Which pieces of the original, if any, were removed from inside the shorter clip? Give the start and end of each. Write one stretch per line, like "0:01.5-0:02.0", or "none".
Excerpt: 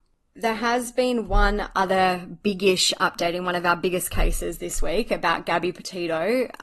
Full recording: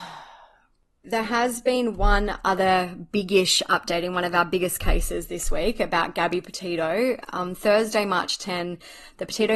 none

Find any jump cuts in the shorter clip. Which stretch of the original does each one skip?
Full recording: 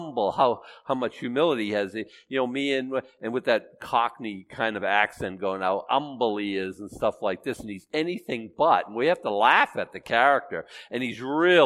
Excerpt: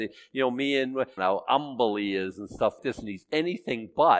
0:03.1-0:05.6
0:07.2-0:07.4

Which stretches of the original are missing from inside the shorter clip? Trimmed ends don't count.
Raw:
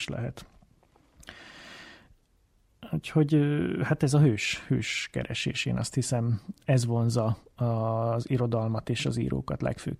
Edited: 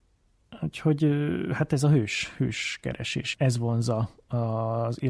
0:05.6-0:06.6

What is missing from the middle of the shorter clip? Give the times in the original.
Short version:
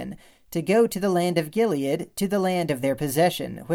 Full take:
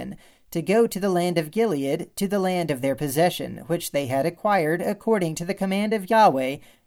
none

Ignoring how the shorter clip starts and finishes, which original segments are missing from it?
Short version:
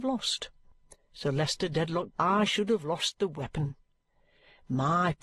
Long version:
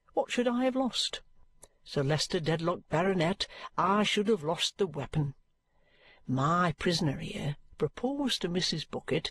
0:02.8-0:03.7

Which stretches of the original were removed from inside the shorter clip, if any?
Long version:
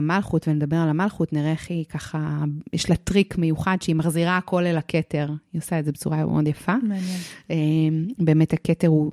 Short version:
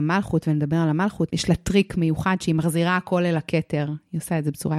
0:01.3-0:02.7

